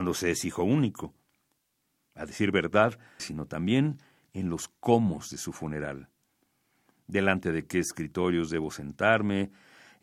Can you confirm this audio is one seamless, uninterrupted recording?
no; 1 cut; at 3.2 s

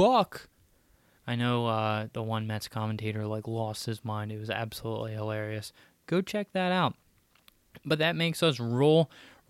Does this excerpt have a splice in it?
yes; 1 cut; at 1.2 s

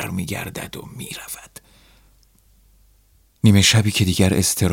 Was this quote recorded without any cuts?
yes; 0 cuts

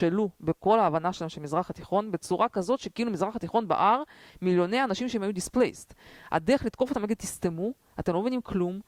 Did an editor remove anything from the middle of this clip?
no; 0 cuts

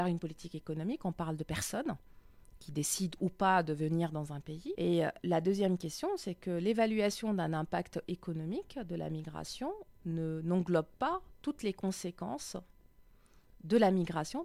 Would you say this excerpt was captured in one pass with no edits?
no; 1 cut; at 4.7 s

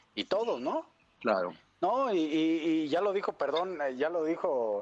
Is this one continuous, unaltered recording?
no; 1 cut; at 1.2 s

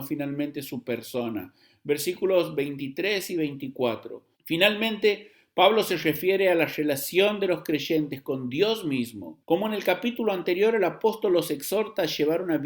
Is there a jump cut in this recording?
yes; 2 cuts; at 4.3 s, 9.4 s

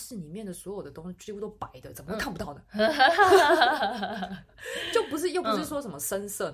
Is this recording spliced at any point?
no; 0 cuts

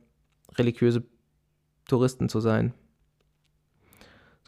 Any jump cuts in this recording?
no; 0 cuts

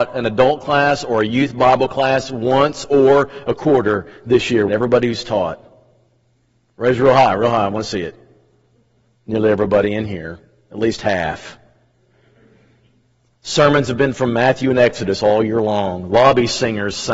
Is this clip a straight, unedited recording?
no; 1 cut; at 4.7 s

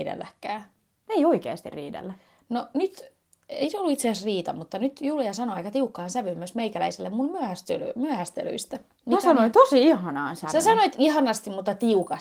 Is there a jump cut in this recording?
no; 0 cuts

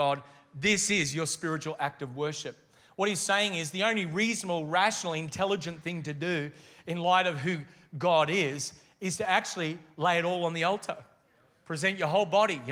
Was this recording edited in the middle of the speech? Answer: no; 0 cuts

